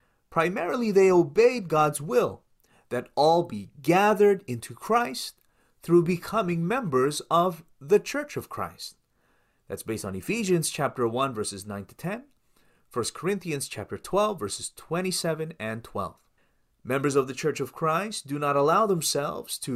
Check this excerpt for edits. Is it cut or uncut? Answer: uncut